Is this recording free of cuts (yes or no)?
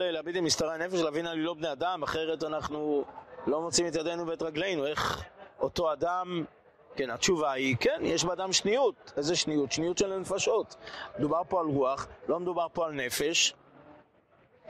no